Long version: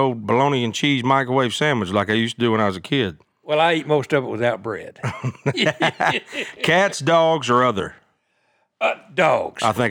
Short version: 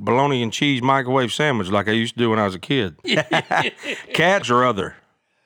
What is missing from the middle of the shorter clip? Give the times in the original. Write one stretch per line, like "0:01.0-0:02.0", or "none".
0:03.3-0:05.5
0:06.9-0:07.4